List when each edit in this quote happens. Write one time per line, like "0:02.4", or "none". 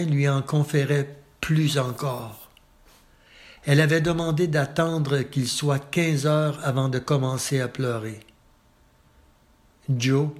none